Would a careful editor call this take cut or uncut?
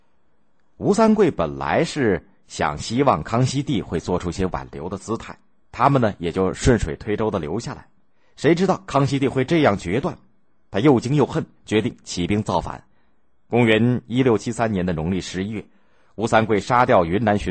uncut